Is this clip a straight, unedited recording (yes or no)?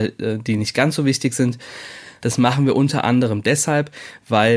no